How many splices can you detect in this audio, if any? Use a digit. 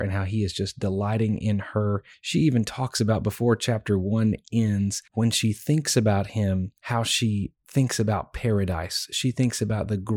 2